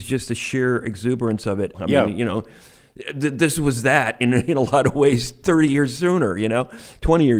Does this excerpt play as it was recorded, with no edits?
no; 1 cut; at 1.7 s

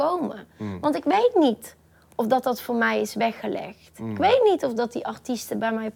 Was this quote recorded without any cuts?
yes; 0 cuts

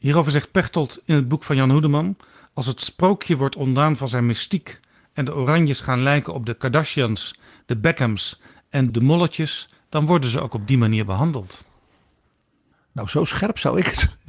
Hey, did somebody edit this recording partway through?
yes; 1 cut; at 8.9 s

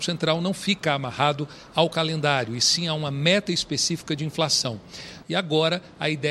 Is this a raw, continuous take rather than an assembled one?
no; 1 cut; at 5.2 s

